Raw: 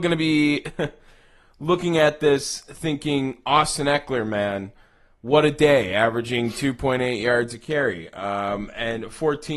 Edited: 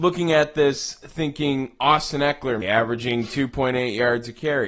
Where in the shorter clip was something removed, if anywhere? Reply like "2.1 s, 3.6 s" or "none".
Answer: 2.6 s